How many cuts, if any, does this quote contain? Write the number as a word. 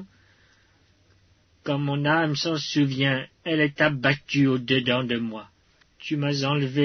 one